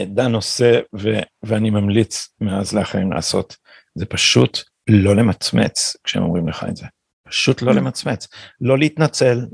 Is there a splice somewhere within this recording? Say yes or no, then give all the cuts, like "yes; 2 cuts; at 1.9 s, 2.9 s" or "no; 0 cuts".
no; 0 cuts